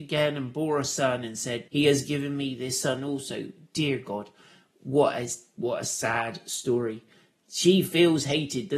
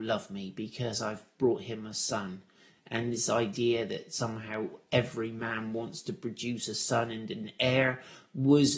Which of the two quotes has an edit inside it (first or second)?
first